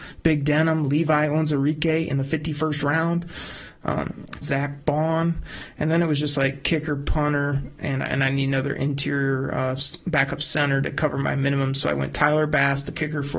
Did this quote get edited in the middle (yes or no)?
yes